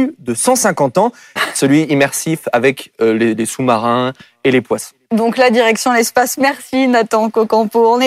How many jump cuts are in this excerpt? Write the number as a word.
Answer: one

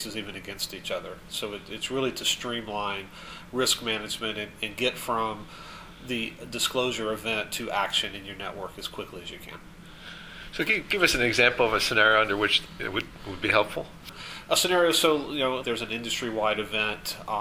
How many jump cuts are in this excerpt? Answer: one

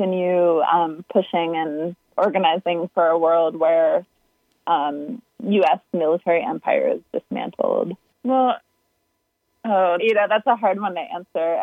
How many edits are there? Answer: two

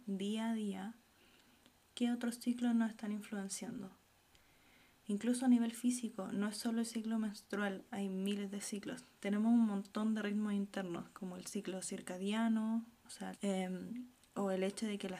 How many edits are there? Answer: two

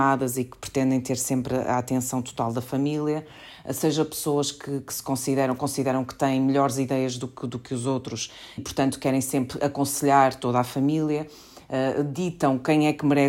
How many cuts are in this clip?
one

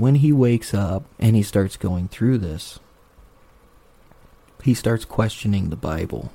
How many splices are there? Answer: one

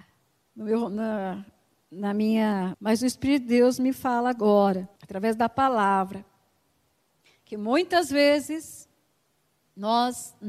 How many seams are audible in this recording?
two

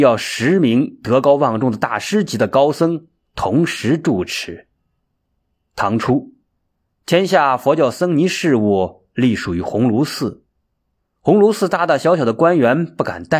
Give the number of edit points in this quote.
zero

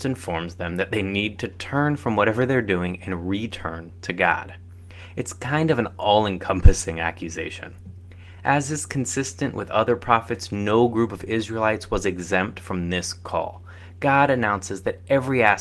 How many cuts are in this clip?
zero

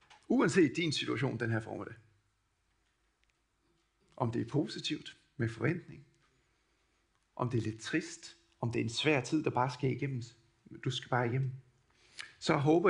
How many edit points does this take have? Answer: zero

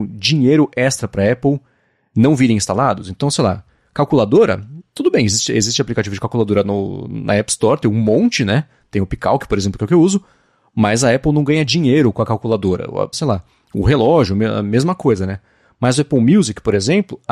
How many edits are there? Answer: one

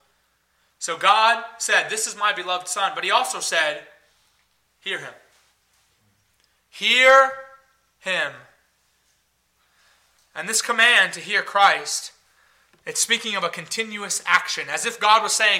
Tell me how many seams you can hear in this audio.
zero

